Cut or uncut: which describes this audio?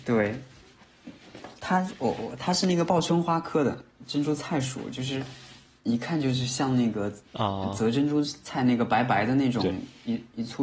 uncut